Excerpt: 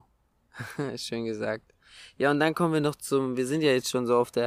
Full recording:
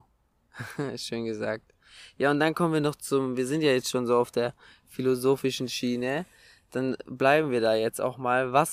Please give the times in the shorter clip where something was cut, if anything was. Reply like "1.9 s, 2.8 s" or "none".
none